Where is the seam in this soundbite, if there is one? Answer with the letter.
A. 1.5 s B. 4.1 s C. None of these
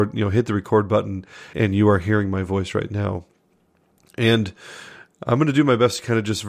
A